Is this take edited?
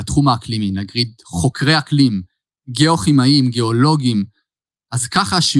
no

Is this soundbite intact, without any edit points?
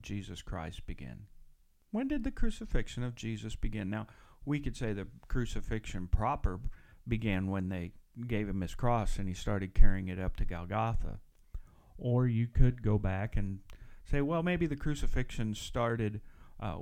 yes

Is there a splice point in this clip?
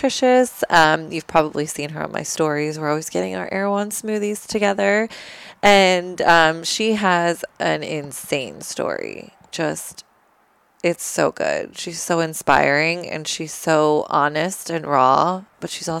no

